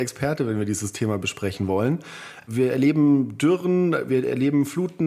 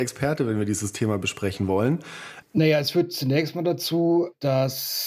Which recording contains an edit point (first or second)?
second